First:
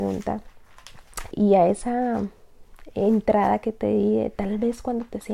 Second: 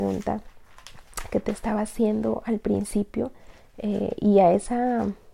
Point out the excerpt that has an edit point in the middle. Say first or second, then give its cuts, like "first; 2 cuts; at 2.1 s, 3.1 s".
first; 1 cut; at 1.3 s